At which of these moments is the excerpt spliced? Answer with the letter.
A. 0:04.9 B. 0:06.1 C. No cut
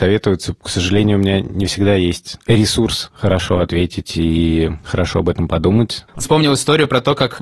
B